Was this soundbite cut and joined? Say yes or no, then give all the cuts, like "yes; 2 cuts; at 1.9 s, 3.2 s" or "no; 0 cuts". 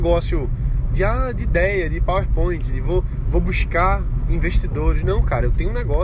no; 0 cuts